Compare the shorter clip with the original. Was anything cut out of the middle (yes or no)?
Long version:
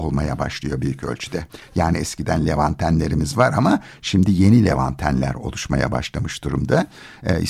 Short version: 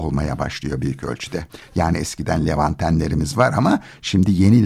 no